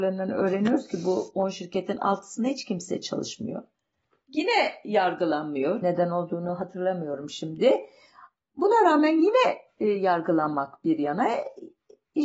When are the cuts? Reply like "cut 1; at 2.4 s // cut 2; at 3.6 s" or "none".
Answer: cut 1; at 5.8 s